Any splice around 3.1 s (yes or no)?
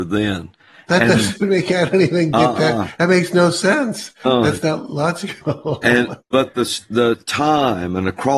no